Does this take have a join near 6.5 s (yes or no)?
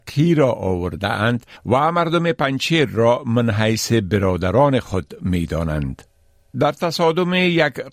yes